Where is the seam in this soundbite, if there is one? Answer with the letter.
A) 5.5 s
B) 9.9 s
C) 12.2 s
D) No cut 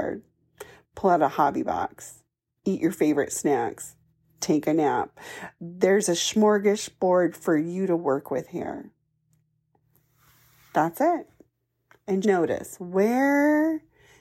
C